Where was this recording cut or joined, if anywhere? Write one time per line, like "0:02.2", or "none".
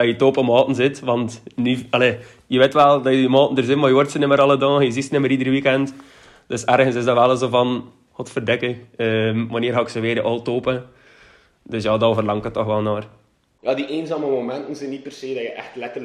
none

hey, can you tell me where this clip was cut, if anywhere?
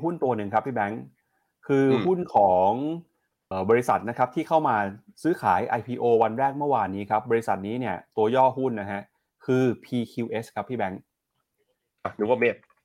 0:03.5

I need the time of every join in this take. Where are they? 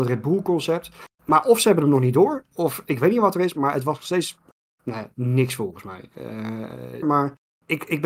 0:07.0

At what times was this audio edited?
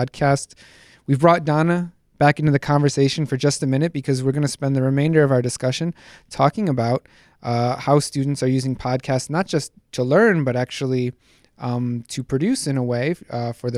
none

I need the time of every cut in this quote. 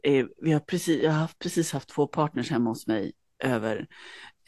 none

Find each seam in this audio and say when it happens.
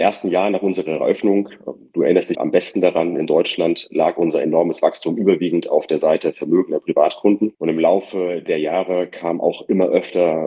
0:02.3
0:07.5

